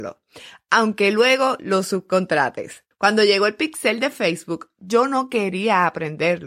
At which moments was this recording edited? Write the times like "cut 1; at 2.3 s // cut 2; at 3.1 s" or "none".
cut 1; at 2.9 s